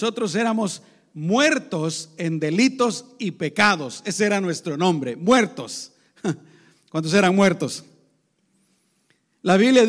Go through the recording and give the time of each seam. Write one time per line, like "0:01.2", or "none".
none